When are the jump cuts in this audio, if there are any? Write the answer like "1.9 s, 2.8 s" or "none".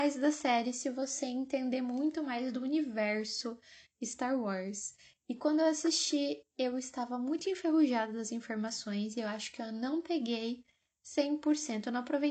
none